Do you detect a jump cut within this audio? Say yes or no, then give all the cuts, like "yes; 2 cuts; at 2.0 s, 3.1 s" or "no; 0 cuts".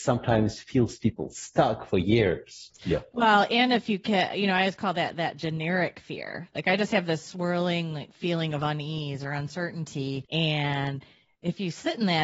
no; 0 cuts